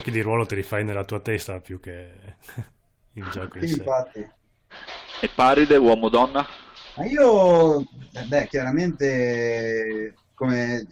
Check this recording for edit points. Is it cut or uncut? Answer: uncut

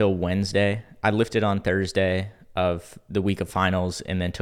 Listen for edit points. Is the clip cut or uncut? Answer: uncut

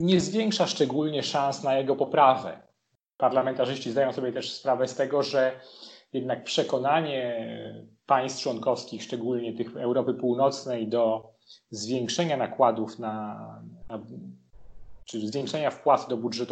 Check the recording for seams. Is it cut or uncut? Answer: uncut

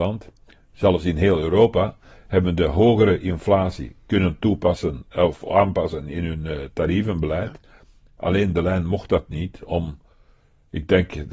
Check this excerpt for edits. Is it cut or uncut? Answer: uncut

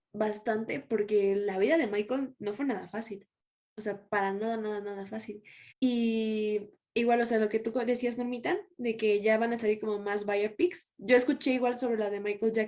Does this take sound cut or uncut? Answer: cut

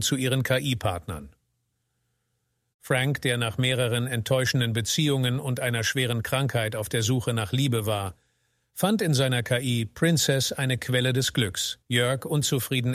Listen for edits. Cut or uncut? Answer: cut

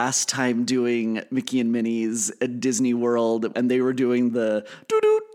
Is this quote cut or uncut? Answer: cut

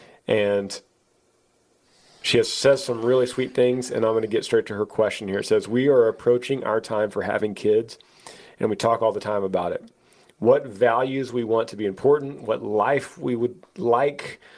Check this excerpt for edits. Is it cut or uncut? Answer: uncut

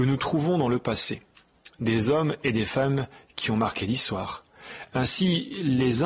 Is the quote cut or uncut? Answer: uncut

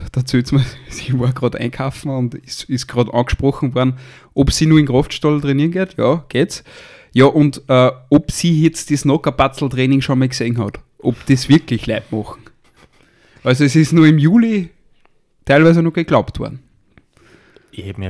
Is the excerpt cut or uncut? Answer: uncut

